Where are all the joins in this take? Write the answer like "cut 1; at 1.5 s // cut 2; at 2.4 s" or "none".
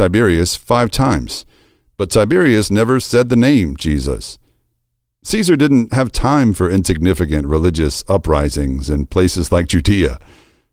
none

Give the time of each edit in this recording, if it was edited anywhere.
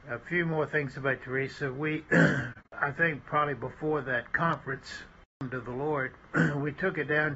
none

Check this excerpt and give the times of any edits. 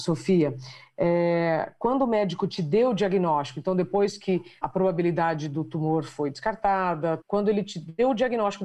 cut 1; at 4.6 s // cut 2; at 7.2 s

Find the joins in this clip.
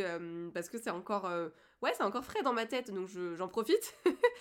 none

